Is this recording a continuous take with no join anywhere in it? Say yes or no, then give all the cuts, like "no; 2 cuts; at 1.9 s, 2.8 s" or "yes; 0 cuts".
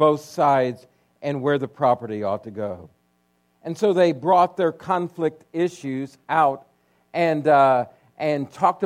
yes; 0 cuts